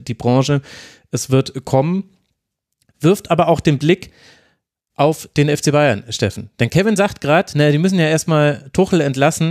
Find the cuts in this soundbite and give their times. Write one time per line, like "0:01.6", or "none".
none